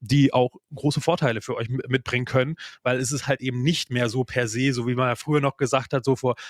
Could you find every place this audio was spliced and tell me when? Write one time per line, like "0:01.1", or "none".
none

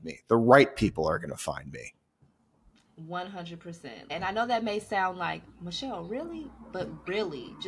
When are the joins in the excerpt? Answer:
0:04.1

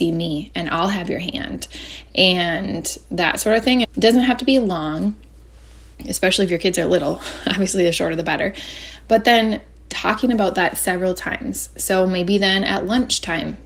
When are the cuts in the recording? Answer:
0:03.8

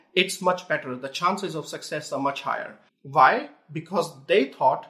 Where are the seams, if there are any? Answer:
0:02.9

